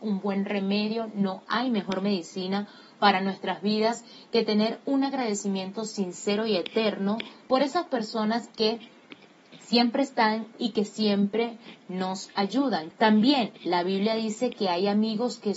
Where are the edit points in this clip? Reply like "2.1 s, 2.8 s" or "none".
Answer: 12.9 s